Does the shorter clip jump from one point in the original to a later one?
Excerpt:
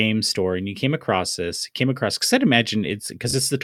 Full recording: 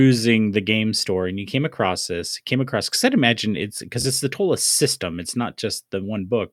no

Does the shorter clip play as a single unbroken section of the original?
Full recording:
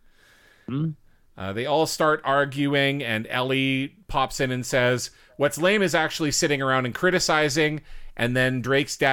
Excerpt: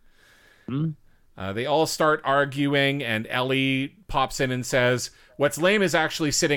yes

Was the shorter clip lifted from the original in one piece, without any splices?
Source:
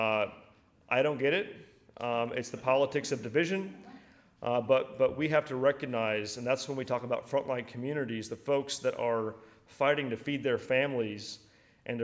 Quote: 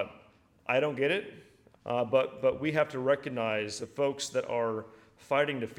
no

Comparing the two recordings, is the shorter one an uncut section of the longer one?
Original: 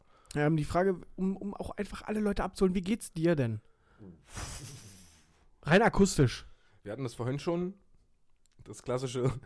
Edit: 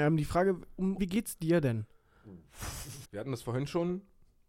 no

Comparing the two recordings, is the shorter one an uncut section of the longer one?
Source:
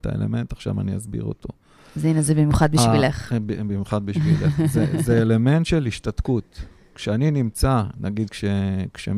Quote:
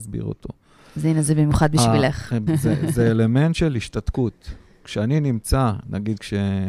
no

